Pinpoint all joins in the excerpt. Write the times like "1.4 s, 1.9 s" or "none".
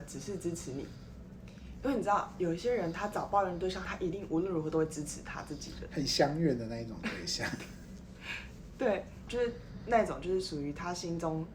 3.8 s, 9.3 s